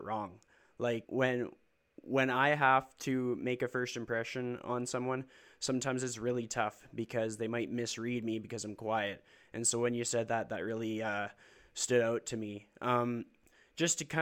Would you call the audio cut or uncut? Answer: cut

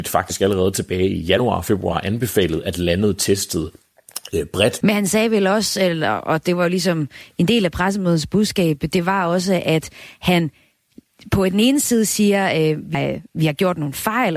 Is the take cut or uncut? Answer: cut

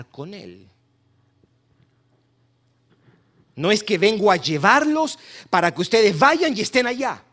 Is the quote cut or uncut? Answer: uncut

